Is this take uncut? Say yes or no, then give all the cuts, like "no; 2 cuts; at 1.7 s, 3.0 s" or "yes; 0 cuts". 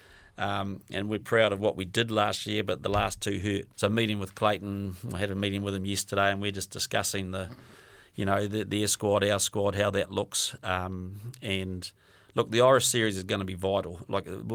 no; 2 cuts; at 1.2 s, 3.7 s